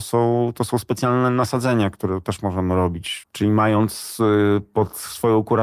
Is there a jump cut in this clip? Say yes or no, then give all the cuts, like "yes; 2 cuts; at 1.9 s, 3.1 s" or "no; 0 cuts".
yes; 1 cut; at 3.2 s